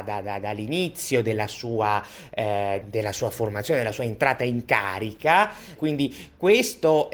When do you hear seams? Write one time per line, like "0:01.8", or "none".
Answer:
0:02.8
0:05.8